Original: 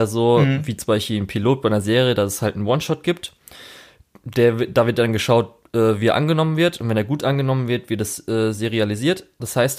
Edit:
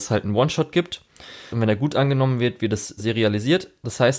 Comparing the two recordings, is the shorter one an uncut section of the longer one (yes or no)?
no